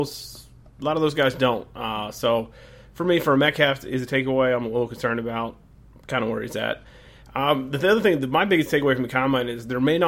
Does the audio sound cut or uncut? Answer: uncut